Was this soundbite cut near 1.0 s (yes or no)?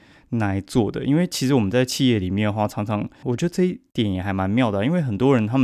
no